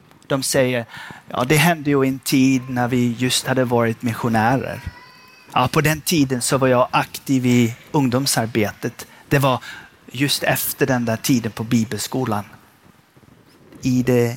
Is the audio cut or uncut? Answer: uncut